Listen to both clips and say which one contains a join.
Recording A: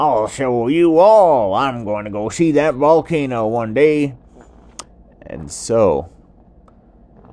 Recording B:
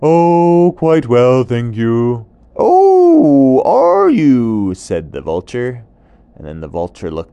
B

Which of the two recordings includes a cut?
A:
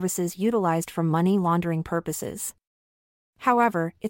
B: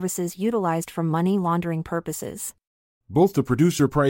B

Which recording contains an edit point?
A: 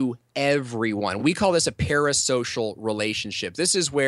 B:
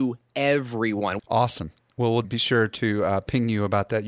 B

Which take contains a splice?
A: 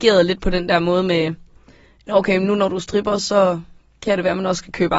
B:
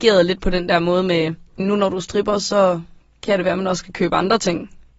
B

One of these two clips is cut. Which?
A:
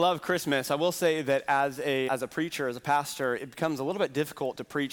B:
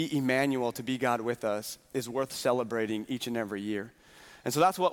A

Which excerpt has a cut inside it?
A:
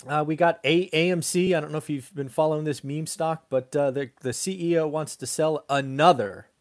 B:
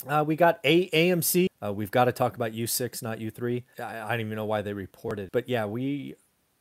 B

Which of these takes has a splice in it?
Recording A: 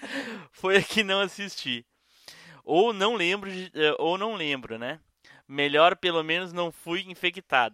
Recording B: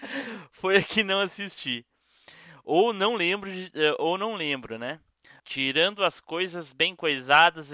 B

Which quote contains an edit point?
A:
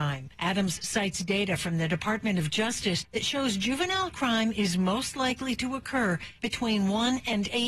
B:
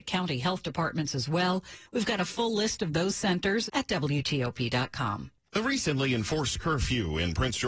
B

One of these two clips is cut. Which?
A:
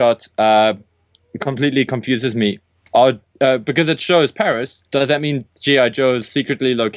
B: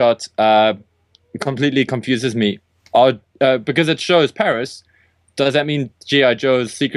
A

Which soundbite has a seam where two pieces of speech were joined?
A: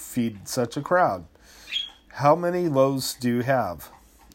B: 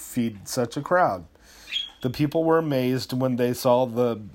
B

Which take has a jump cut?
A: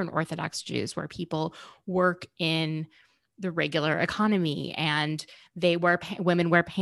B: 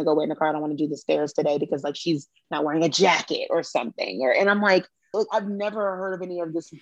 B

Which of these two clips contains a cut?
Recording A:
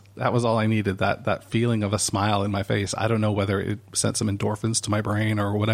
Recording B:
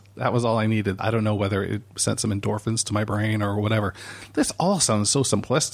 B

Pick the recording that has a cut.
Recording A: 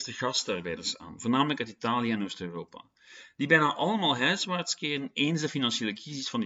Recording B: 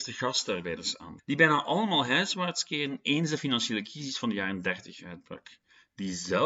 B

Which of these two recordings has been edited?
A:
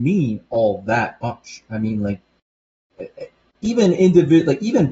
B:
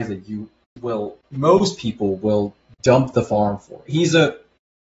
B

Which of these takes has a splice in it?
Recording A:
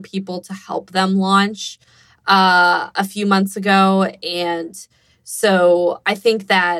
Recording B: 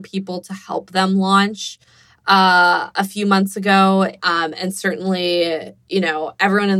B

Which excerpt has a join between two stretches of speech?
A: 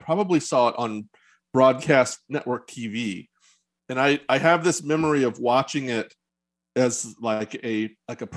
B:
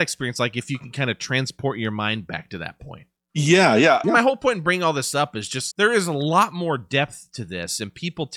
B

